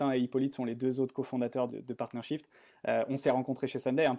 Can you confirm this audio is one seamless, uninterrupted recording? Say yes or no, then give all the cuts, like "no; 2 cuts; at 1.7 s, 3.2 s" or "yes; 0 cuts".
no; 1 cut; at 1.7 s